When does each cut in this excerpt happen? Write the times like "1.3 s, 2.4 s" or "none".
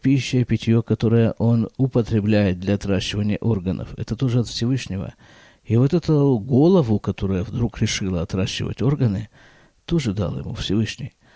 none